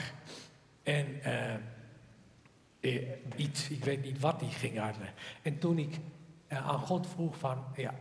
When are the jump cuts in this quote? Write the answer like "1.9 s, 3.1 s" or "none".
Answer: 3.3 s